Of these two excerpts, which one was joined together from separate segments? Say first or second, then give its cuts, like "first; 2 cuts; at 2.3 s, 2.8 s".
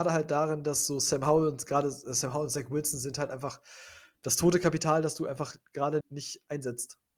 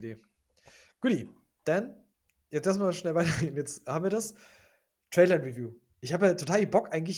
first; 1 cut; at 6.0 s